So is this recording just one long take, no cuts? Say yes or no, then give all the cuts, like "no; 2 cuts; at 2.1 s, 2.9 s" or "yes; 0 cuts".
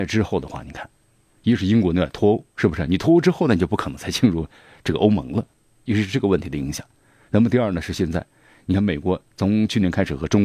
no; 1 cut; at 5.9 s